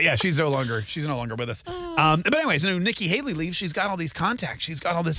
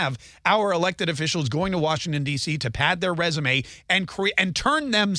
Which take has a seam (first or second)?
first